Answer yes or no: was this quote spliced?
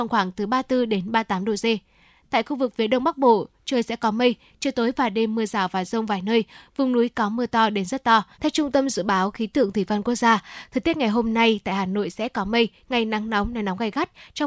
yes